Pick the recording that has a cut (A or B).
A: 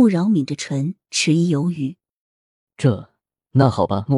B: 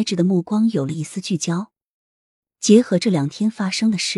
A